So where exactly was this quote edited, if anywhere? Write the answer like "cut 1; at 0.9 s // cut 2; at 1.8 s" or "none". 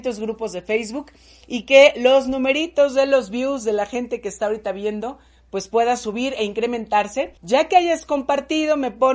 cut 1; at 7.4 s